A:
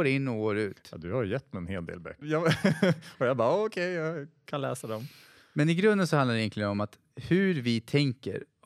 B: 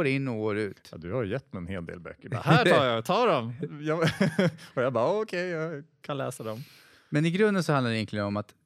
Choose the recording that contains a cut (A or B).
A